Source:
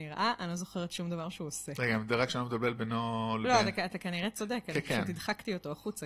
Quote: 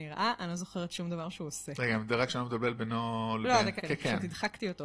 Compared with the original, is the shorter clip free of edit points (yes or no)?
no